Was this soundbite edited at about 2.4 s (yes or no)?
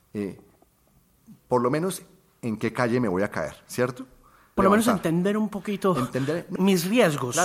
no